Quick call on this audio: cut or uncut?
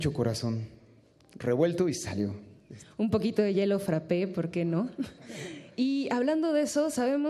uncut